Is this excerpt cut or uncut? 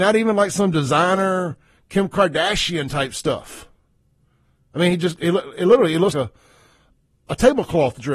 cut